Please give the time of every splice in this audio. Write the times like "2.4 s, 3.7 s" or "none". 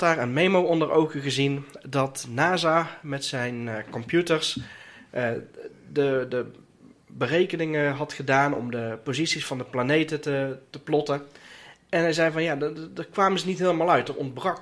none